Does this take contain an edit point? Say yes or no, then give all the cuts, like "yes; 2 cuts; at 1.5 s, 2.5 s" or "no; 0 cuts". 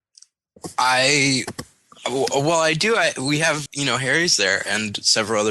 yes; 1 cut; at 3.7 s